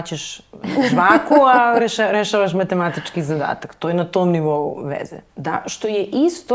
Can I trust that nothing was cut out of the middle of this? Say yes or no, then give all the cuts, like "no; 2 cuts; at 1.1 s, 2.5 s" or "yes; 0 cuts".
no; 1 cut; at 5.3 s